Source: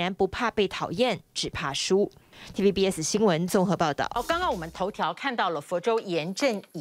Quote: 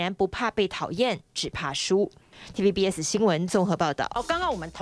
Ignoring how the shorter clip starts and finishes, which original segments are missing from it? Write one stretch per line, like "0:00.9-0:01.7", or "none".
none